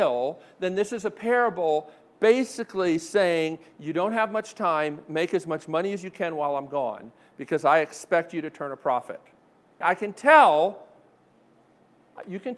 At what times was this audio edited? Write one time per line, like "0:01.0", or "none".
0:09.8